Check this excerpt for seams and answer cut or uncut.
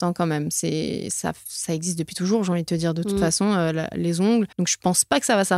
cut